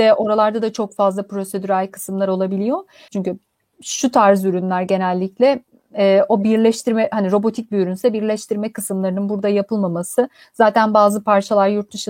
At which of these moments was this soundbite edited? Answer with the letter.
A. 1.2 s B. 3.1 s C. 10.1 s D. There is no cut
B